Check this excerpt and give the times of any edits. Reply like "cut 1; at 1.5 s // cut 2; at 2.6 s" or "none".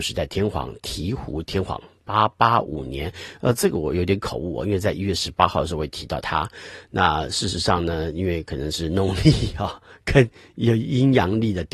none